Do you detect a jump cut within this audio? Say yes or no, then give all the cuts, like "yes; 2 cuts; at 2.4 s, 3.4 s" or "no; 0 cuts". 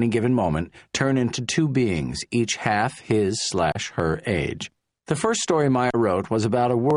yes; 1 cut; at 5.0 s